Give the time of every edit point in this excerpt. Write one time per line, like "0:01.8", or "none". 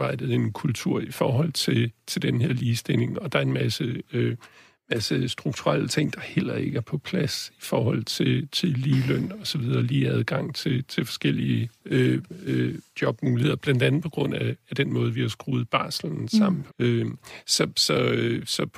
0:16.7